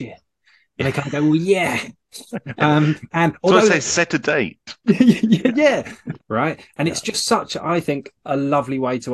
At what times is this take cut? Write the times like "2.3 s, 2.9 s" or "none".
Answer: 6.2 s